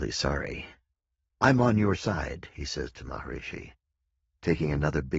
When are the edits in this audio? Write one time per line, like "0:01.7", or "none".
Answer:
0:01.3